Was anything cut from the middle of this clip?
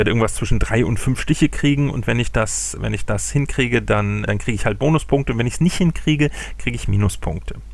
yes; 2 cuts; at 2.8 s, 4.3 s

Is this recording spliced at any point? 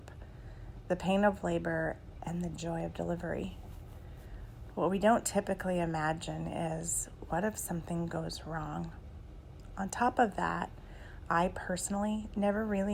no; 0 cuts

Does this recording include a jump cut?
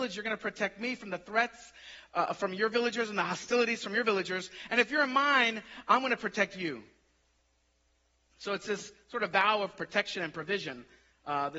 no; 0 cuts

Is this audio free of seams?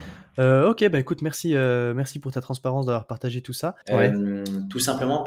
no; 1 cut; at 3.8 s

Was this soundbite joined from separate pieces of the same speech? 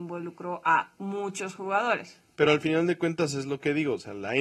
no; 0 cuts

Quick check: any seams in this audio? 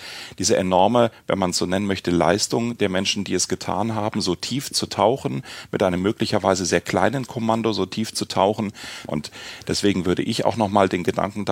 yes; 1 cut; at 9.1 s

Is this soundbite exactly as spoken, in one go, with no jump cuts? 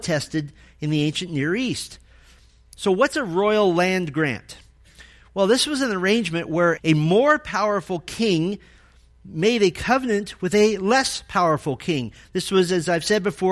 no; 1 cut; at 6.8 s

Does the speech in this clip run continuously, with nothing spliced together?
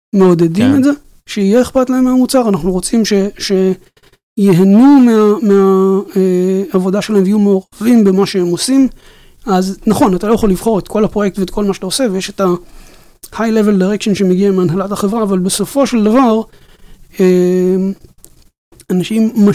yes; 0 cuts

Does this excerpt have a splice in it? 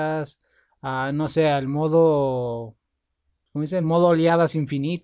no; 0 cuts

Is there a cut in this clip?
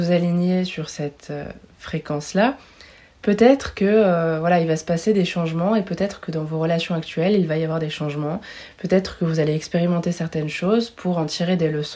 no; 0 cuts

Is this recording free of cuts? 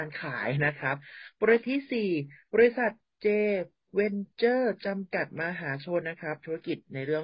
no; 2 cuts; at 1.6 s, 6.0 s

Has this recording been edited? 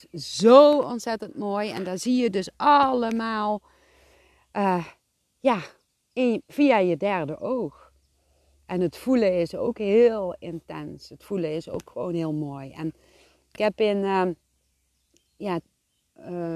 no; 0 cuts

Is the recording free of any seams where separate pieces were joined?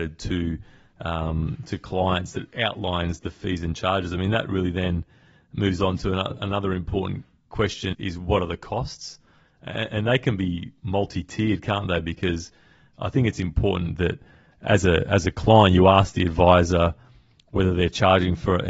no; 1 cut; at 7.9 s

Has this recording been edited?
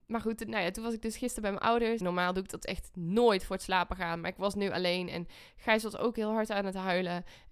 yes; 1 cut; at 2.0 s

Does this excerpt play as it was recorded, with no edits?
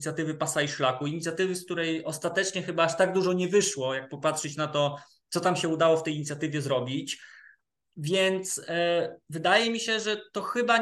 yes; 0 cuts

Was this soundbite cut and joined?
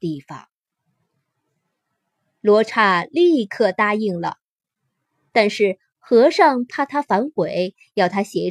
no; 0 cuts

